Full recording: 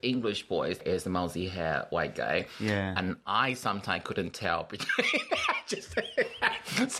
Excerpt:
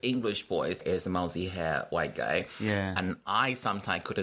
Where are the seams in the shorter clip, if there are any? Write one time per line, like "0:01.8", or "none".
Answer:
none